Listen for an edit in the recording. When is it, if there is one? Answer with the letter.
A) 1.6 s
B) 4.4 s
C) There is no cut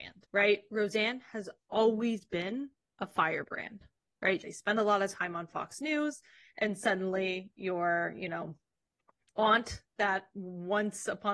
B